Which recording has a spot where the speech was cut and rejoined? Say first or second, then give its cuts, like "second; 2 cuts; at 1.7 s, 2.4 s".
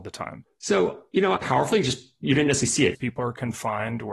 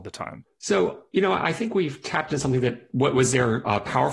first; 2 cuts; at 1.4 s, 2.9 s